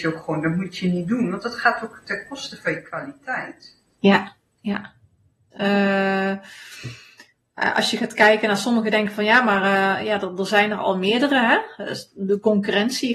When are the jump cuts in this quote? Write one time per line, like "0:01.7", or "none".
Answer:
0:05.5

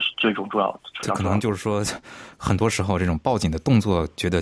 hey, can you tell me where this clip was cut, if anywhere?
none

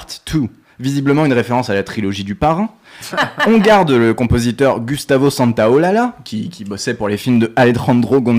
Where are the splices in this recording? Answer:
0:03.1

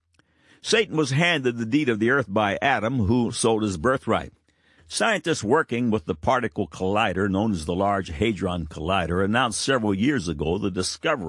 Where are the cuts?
0:03.3
0:04.8

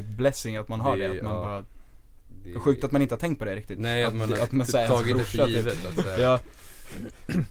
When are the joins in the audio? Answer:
none

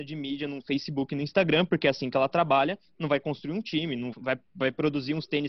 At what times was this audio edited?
0:04.1

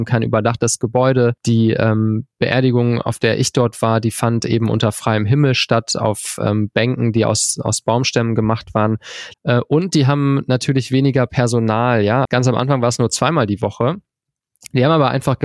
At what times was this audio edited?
0:01.4
0:09.3
0:12.3

